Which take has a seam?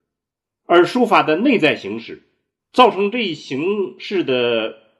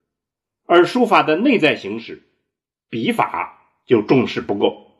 first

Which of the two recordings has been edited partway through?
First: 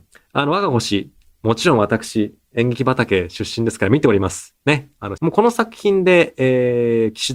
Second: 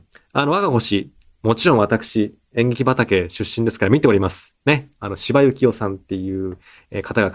first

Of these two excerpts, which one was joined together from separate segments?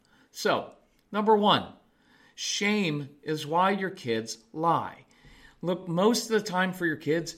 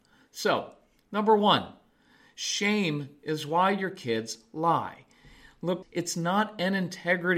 second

